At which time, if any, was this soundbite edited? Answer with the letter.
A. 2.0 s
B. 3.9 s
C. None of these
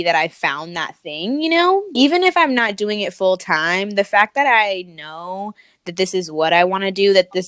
A